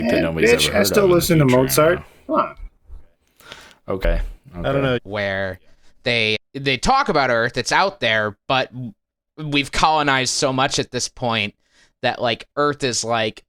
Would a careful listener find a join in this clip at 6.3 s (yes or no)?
yes